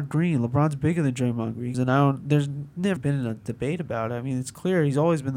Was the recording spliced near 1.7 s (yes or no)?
yes